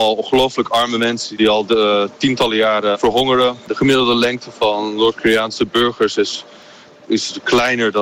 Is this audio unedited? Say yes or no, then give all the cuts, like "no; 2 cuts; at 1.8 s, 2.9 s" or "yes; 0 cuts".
no; 1 cut; at 2.9 s